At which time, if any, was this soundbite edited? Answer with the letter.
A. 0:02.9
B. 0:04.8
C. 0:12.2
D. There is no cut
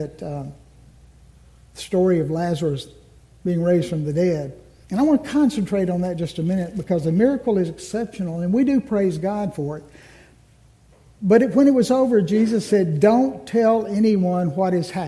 B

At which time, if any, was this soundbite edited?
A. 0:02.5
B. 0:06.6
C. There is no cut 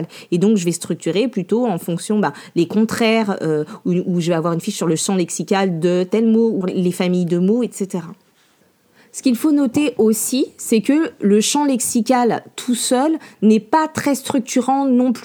B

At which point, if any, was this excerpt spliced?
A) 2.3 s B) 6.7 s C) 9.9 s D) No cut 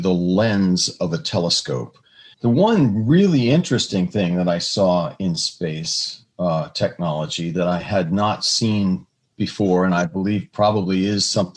A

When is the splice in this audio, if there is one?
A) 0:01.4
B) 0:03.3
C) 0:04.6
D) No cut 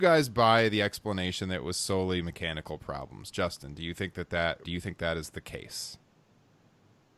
C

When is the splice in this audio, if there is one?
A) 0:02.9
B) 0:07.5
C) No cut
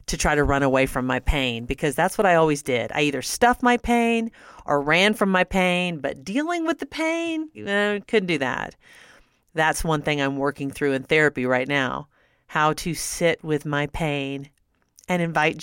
B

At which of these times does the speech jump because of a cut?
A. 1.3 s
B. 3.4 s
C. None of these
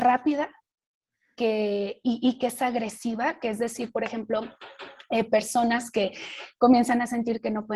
C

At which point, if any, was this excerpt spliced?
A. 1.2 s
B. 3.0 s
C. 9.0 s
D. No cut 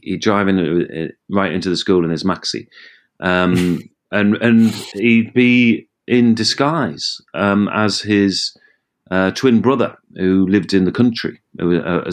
D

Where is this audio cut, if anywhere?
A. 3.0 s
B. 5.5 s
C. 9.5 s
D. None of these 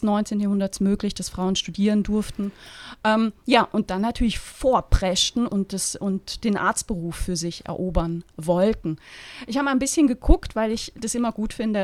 B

